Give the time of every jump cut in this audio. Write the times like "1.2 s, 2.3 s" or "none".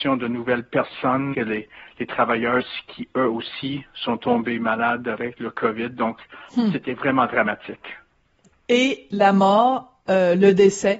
1.3 s